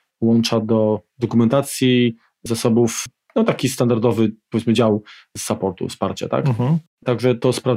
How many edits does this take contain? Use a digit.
0